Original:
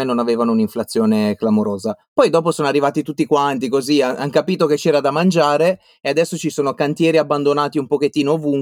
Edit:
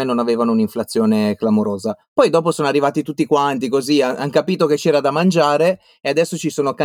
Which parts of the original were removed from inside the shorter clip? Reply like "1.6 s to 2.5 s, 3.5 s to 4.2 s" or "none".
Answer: none

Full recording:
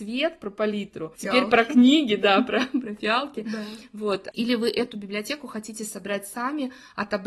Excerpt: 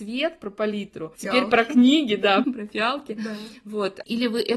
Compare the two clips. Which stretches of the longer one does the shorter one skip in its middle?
2.4 s to 2.7 s

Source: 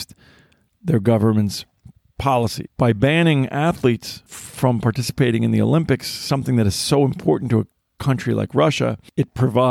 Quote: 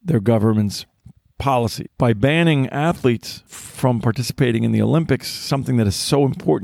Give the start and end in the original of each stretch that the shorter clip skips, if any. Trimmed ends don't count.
none

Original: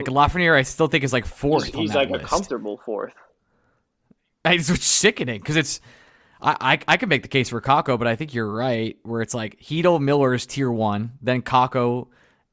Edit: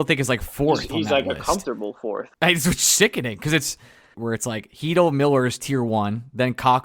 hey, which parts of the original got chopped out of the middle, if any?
3.2 s to 4.4 s, 6.2 s to 9.0 s

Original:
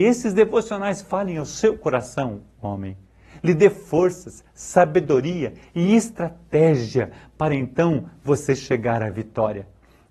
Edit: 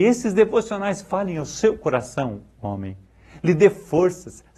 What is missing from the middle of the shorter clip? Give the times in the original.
none

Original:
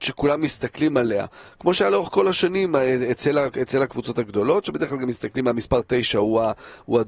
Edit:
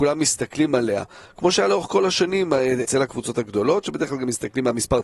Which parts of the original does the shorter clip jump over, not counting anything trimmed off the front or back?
3.1 s to 3.6 s

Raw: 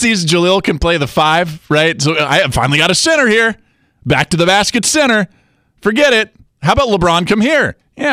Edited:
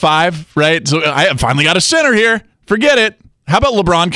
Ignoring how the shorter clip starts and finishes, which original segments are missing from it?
3.6 s to 5.7 s

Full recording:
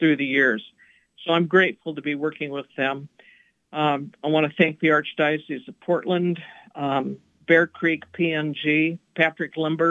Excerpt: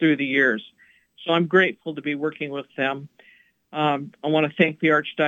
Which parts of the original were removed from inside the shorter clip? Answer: none

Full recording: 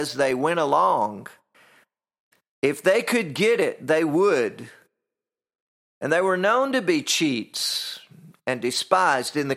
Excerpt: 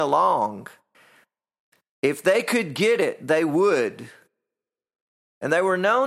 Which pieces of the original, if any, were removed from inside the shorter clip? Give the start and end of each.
none

